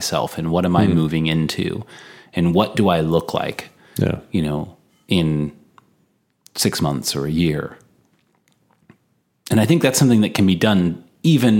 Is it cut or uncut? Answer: uncut